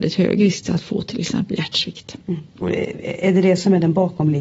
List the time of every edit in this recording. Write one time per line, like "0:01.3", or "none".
0:02.2